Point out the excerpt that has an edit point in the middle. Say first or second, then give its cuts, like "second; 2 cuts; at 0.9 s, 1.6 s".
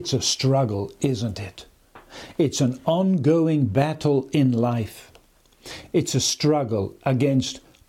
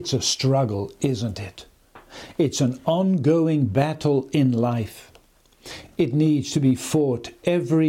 first; 1 cut; at 5.9 s